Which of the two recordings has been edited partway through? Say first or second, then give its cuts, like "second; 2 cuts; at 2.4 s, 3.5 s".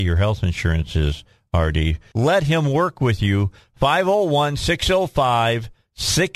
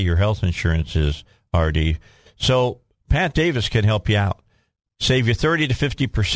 first; 1 cut; at 2.1 s